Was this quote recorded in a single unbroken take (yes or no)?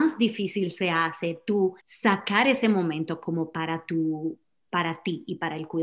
no